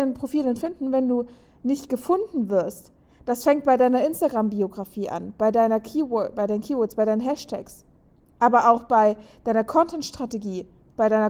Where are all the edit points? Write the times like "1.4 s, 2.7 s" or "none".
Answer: none